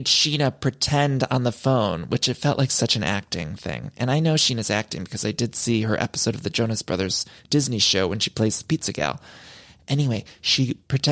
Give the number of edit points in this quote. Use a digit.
0